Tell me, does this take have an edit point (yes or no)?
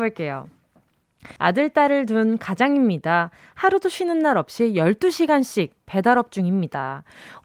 yes